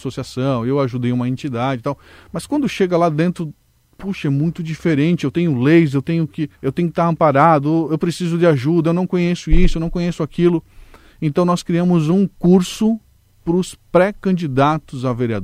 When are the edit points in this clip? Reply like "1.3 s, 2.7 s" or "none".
6.5 s

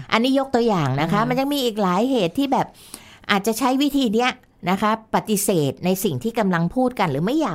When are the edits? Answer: none

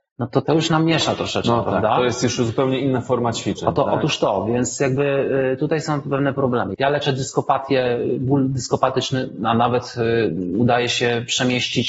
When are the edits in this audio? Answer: none

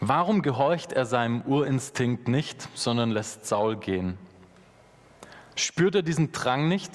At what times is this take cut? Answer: 5.5 s

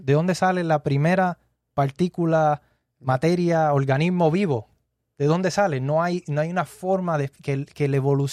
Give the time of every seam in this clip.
none

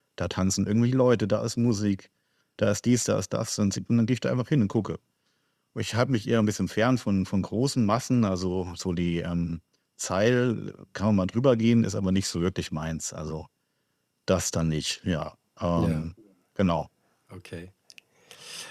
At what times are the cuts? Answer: none

